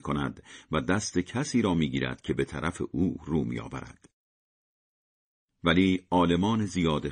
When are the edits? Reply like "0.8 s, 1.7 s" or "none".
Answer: none